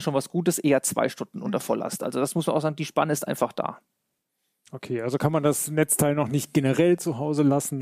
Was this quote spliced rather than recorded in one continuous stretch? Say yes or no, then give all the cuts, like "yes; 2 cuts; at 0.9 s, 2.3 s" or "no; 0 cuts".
no; 0 cuts